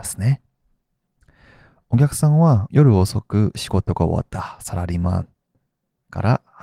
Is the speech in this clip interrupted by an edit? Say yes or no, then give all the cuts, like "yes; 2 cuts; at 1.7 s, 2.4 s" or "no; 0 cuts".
yes; 1 cut; at 2.7 s